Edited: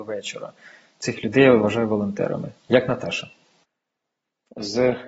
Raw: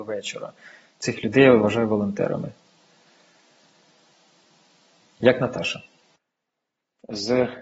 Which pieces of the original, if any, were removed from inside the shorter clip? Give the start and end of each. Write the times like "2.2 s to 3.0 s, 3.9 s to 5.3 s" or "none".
2.6 s to 5.1 s